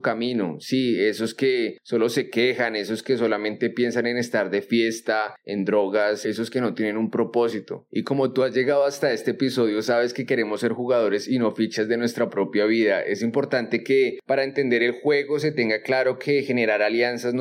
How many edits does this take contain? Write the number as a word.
one